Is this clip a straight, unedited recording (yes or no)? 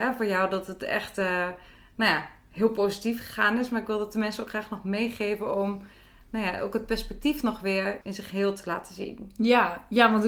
no